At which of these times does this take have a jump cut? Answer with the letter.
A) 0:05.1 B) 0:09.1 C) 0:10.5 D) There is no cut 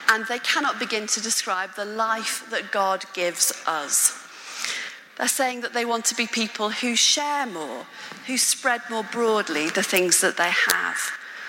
A